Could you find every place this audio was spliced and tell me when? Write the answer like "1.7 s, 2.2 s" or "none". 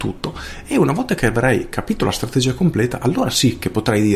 none